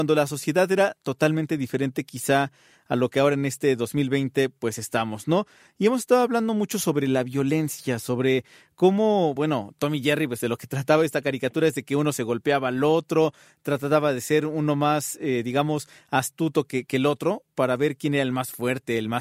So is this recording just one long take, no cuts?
yes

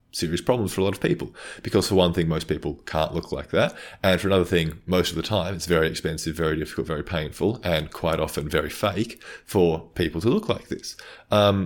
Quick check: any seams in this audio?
no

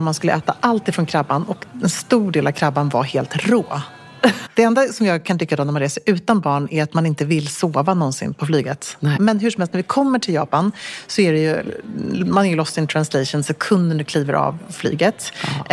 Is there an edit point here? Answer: yes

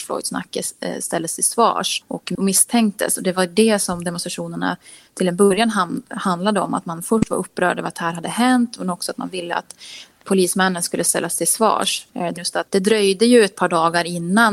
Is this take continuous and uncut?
no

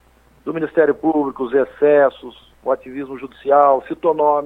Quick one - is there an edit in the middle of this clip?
no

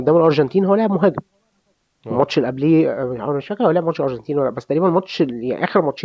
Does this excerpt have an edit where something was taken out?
no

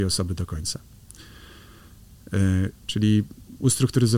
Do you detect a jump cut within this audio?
yes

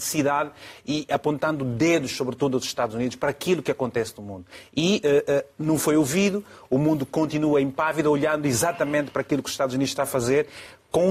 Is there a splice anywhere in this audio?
no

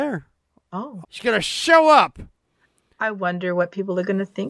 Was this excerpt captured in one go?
no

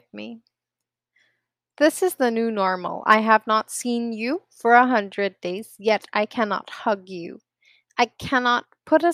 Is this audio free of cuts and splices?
yes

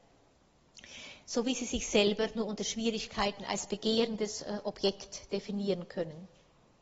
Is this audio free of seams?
yes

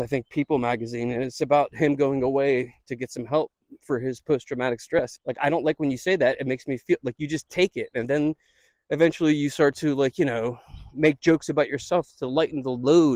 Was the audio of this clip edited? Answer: yes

